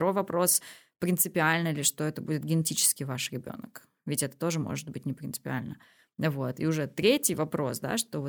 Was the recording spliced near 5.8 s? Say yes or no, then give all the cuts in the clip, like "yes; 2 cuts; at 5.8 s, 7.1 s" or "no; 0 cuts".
no; 0 cuts